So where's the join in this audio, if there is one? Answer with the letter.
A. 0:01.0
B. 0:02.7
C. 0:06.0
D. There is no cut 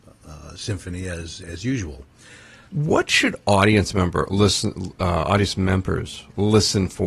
B